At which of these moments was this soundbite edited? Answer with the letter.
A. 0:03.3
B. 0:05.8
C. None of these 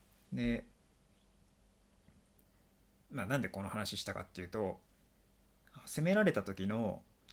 C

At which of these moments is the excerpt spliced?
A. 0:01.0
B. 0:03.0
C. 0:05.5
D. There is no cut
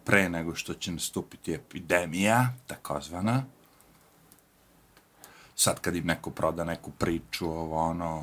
C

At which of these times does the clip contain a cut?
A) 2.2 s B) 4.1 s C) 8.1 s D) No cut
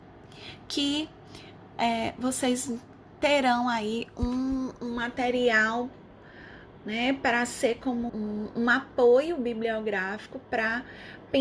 C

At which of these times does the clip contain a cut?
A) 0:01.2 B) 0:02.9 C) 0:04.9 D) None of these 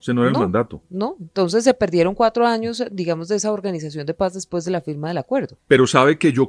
D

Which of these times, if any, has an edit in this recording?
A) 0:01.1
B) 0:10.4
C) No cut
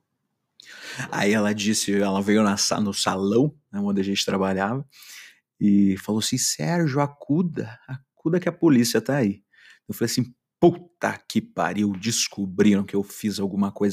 C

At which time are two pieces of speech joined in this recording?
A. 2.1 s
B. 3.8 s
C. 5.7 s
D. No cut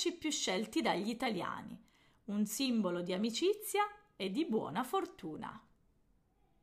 A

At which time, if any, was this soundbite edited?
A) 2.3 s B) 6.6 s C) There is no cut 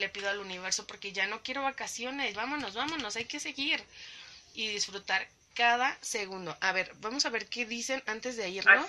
A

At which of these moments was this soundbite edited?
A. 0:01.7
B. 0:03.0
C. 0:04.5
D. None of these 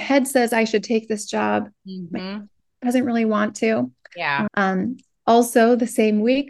C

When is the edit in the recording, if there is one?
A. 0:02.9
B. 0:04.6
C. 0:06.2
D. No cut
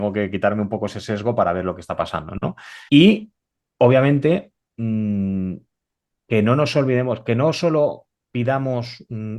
A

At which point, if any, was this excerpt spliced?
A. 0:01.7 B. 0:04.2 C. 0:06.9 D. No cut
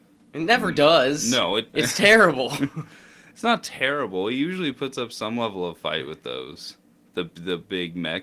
A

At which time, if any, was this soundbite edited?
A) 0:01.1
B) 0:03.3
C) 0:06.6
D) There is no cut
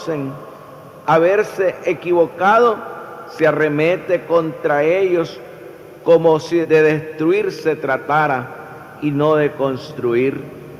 C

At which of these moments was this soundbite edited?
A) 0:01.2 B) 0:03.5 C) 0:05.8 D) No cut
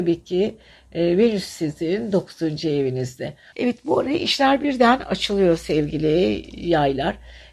B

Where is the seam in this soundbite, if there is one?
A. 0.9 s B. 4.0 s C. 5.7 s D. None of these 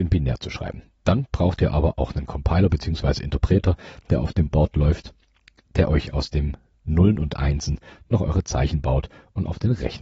D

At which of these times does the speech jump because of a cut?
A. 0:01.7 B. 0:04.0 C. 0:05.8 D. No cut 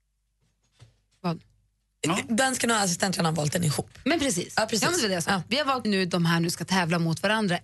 C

